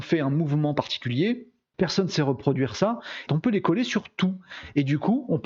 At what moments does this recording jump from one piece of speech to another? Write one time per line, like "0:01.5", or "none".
0:01.7
0:03.3